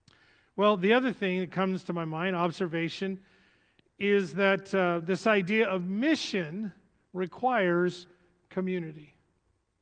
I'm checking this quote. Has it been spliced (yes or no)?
no